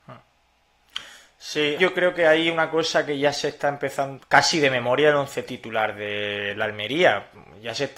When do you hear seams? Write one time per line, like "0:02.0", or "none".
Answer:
0:01.8
0:04.2

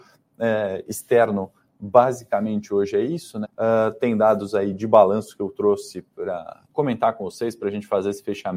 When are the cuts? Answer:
0:03.4
0:06.6

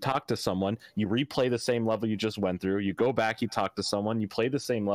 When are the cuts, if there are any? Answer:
none

